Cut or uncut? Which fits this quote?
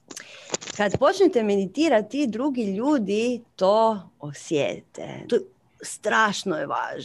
cut